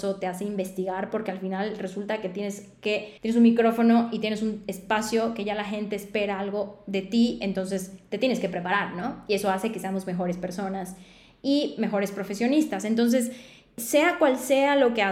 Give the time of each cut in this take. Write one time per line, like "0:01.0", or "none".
0:03.2